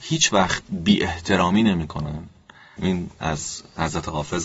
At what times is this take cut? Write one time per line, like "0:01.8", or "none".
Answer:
0:02.8